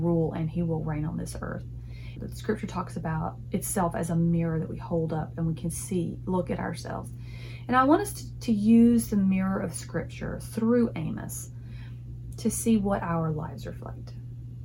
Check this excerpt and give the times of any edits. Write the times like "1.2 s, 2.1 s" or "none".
2.2 s